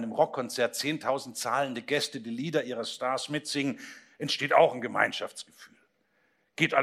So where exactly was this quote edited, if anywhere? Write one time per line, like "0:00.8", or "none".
none